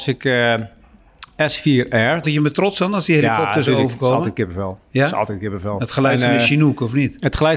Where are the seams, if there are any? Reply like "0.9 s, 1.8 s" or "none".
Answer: 2.2 s